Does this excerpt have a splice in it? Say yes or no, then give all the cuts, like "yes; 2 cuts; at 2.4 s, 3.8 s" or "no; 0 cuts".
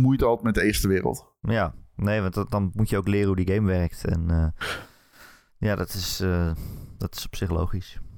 no; 0 cuts